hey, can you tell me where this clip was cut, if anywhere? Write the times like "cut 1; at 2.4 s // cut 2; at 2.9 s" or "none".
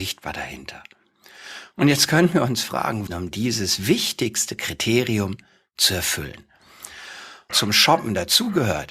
cut 1; at 3.1 s // cut 2; at 7.5 s